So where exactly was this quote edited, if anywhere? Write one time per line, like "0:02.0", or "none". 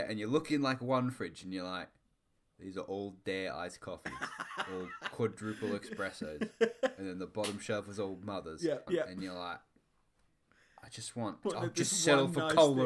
0:08.9
0:11.4